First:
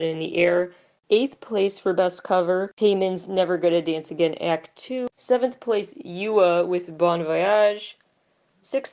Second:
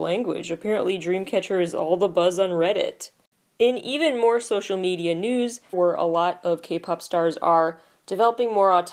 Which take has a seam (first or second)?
second